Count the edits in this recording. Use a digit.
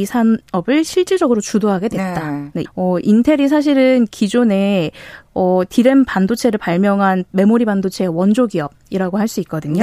1